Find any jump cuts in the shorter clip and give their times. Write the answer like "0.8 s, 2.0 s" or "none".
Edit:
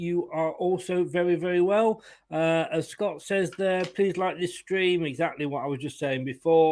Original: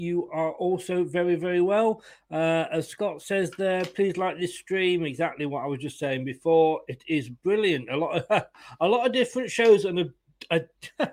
none